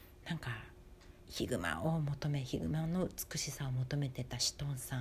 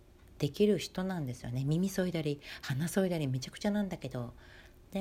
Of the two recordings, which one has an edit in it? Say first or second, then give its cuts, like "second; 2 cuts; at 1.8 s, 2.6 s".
first; 1 cut; at 1.2 s